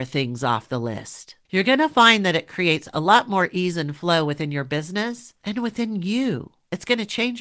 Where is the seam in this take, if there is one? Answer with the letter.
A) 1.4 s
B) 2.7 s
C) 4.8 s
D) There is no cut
A